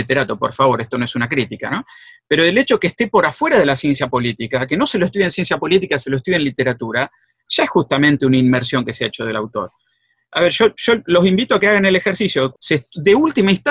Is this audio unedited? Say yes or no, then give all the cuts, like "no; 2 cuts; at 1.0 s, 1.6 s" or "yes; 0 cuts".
no; 1 cut; at 12.5 s